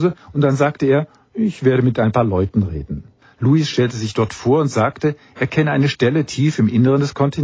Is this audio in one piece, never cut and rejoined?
no; 1 cut; at 3.2 s

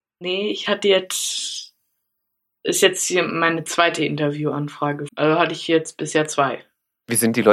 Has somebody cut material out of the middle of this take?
yes; 1 cut; at 5.1 s

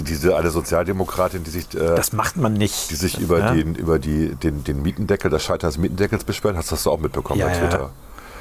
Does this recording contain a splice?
no; 0 cuts

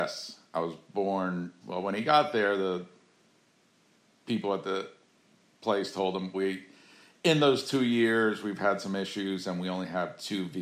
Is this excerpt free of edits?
no; 2 cuts; at 1.6 s, 6.3 s

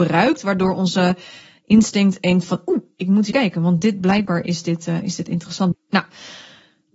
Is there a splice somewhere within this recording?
yes; 2 cuts; at 3.3 s, 5.7 s

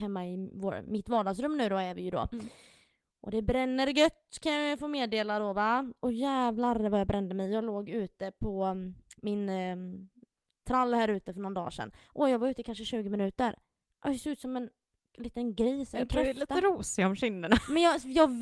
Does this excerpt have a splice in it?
no; 0 cuts

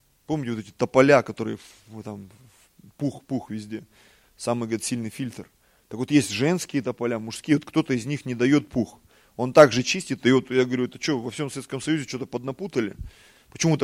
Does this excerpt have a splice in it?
yes; 1 cut; at 3.2 s

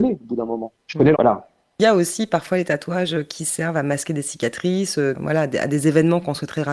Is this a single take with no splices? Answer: no; 2 cuts; at 1.1 s, 5.1 s

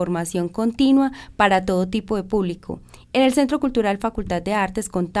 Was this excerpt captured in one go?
yes; 0 cuts

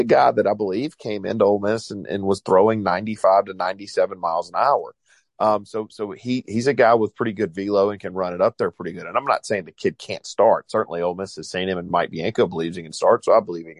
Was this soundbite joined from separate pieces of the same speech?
no; 0 cuts

